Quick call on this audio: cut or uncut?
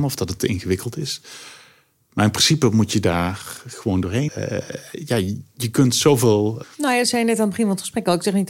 cut